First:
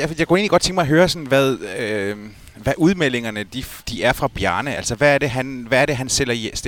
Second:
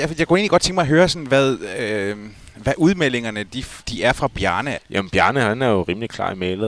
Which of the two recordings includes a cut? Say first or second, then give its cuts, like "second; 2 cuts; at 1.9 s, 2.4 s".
second; 1 cut; at 4.8 s